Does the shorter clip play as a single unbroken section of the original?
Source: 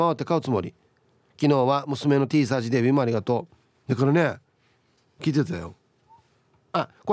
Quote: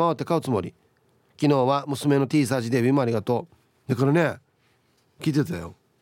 yes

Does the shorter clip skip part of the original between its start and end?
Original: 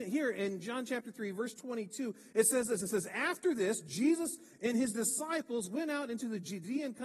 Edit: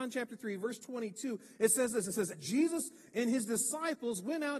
yes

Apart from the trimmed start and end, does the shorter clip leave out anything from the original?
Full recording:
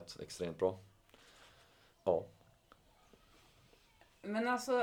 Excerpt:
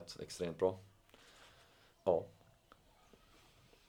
no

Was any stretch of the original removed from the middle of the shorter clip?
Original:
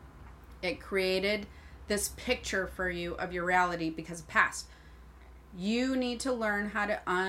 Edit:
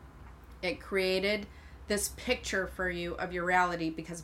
no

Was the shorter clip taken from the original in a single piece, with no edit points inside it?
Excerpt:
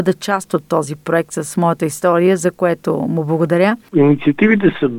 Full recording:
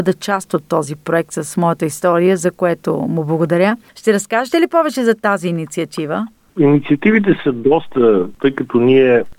no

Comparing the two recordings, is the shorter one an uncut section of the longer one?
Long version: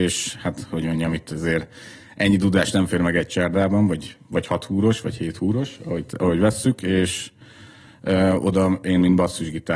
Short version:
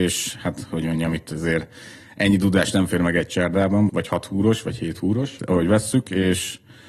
no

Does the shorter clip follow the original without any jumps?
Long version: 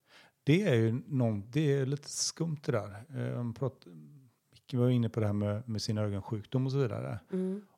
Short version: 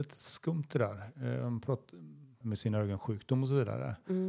no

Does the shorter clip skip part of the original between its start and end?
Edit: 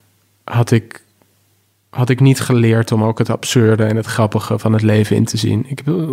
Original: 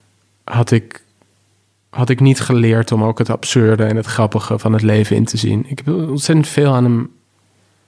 no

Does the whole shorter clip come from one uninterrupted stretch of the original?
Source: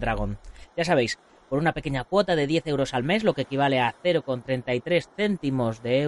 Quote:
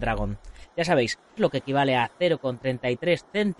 no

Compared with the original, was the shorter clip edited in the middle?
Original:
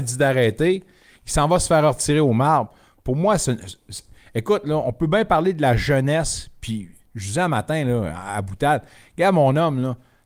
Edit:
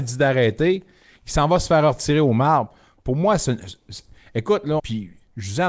yes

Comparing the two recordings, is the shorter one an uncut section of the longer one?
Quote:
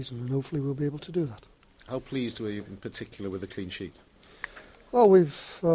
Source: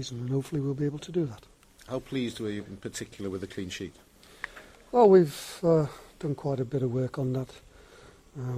yes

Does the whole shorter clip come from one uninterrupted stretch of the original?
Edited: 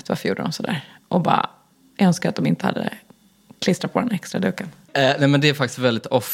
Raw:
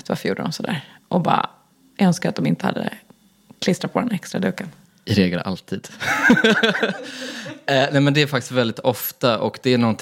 no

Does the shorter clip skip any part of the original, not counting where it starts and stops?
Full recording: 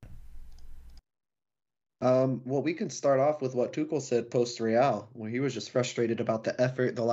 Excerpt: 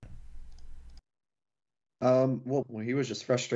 yes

